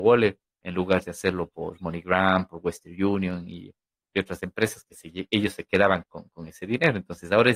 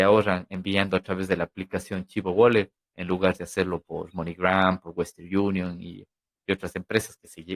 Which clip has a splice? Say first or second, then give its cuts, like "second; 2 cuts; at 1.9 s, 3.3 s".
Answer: first; 1 cut; at 6.0 s